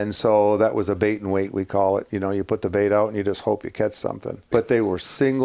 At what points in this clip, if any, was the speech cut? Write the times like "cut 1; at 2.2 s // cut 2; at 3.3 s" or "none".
cut 1; at 4.5 s